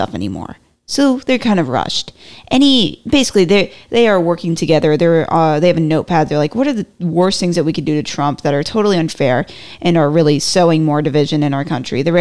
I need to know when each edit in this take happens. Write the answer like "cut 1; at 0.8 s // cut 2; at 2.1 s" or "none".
none